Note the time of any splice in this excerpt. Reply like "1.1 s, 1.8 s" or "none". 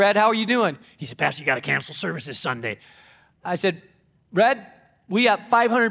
none